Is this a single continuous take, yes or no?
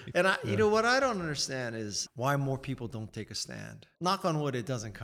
no